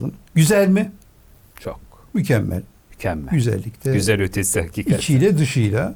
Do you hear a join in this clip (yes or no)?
no